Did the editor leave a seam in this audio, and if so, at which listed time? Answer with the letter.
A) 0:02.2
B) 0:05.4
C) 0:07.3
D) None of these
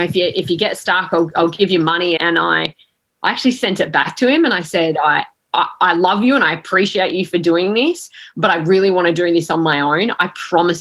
A